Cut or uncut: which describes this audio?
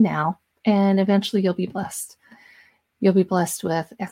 uncut